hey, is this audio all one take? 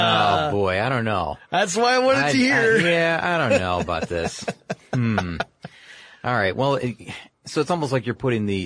yes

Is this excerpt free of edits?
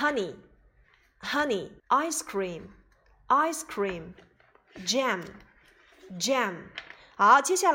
no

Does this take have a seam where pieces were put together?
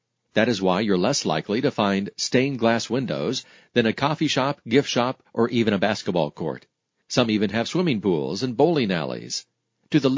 yes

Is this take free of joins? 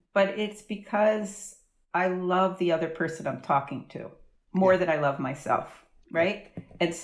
no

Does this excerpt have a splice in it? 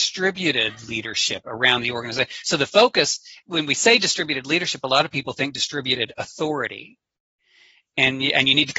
no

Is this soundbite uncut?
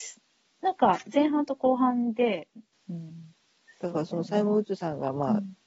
no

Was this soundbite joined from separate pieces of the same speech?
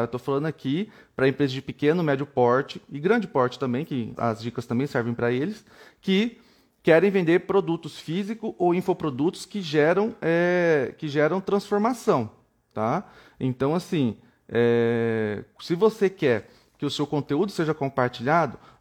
yes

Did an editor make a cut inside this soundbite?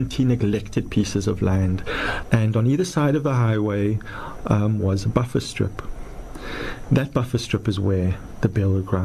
yes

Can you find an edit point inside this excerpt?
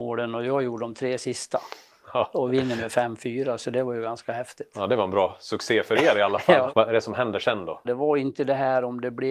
yes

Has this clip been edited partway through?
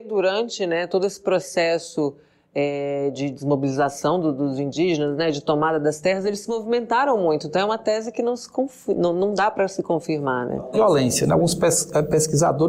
yes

